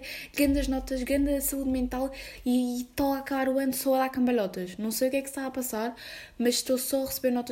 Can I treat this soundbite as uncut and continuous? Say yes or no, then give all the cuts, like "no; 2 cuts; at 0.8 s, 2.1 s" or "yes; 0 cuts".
yes; 0 cuts